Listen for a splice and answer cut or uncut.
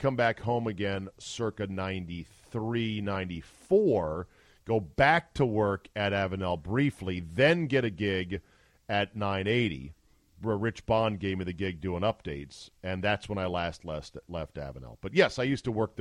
uncut